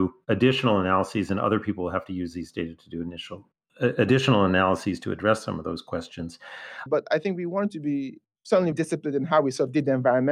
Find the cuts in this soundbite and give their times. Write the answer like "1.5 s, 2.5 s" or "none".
6.9 s, 8.7 s